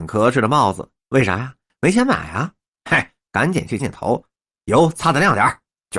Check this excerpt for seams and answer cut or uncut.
cut